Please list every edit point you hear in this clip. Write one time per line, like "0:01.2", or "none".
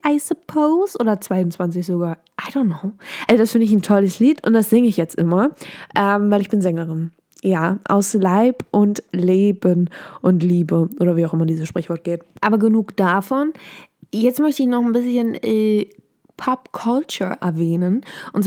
0:03.3